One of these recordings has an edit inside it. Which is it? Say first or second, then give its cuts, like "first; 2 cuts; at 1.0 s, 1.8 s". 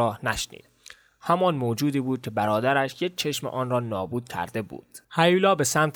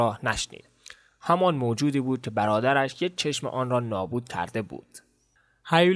first; 1 cut; at 5.0 s